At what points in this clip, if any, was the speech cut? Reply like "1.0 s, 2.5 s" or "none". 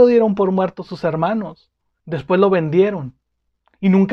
2.0 s